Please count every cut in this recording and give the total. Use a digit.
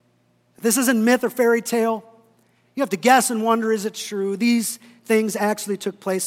0